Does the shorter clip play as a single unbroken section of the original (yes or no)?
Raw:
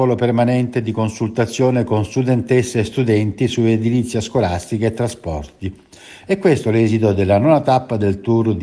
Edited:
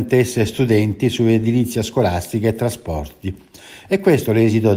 yes